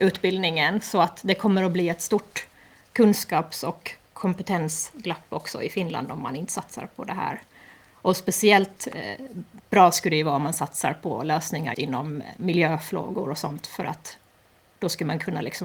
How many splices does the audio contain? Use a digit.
1